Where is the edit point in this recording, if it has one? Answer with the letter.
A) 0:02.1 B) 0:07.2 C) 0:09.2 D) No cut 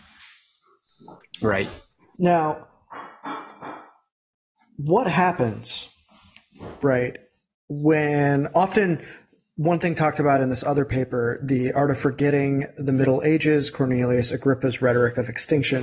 A